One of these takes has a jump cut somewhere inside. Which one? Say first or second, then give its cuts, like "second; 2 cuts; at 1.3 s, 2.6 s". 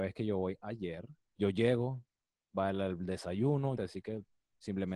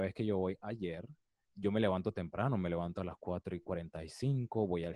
first; 2 cuts; at 1.3 s, 3.8 s